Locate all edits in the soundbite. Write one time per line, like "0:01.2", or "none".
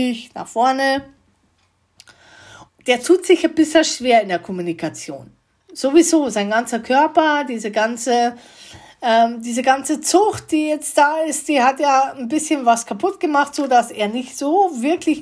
0:02.7